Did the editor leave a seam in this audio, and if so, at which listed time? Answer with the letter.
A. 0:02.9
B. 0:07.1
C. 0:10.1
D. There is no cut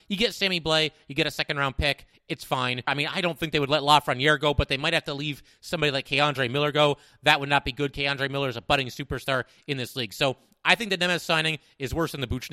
A